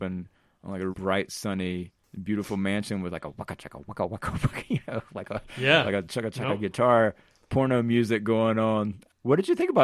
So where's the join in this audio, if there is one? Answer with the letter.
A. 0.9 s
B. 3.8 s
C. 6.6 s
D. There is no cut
A